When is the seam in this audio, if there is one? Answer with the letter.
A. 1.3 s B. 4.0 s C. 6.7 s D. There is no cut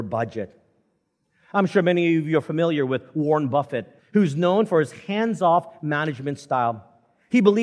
B